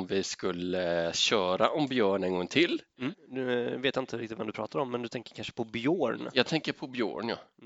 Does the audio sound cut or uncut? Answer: cut